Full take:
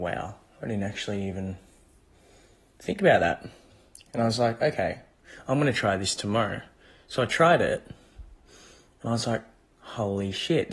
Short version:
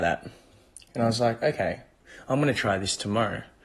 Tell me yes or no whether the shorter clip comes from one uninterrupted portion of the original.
yes